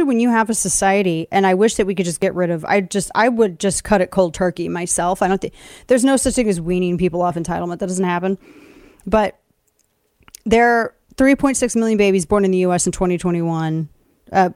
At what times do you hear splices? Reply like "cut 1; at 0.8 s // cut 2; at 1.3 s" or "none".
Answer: none